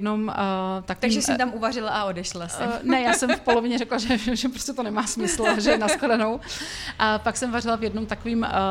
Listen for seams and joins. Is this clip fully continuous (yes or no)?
yes